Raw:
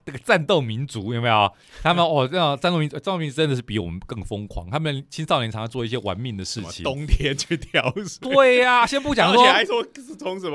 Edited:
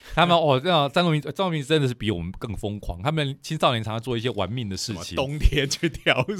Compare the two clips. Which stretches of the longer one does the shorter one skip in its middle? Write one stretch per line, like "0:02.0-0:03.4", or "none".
none